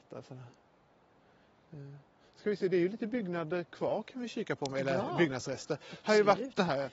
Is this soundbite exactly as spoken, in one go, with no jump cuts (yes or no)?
yes